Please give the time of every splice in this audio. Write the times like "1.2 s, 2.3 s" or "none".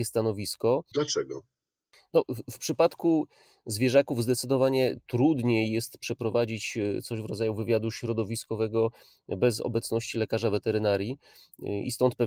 0.9 s